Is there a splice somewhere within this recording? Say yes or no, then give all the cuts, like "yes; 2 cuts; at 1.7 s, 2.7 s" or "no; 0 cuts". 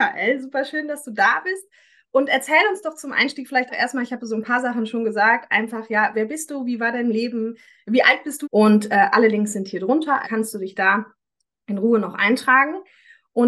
yes; 3 cuts; at 3.7 s, 8.4 s, 10.2 s